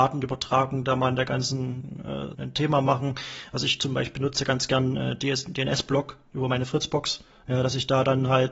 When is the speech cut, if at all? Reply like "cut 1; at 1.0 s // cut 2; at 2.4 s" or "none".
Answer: cut 1; at 2.3 s